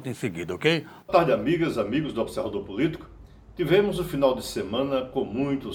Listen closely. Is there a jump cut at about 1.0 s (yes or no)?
yes